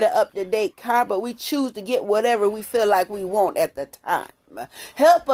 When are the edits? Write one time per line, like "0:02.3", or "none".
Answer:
none